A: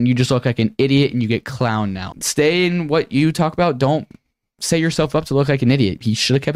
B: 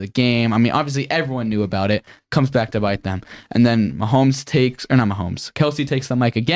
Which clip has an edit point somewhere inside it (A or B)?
A